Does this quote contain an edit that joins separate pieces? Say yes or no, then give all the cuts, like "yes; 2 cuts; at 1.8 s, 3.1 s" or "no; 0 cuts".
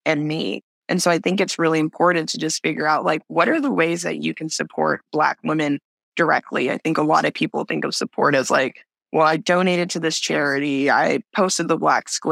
no; 0 cuts